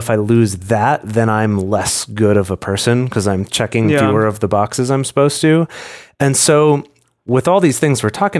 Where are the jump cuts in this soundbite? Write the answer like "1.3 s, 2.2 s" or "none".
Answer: none